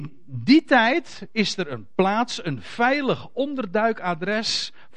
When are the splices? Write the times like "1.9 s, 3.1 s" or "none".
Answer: none